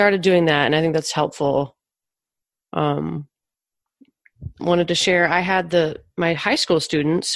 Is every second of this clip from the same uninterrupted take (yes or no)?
no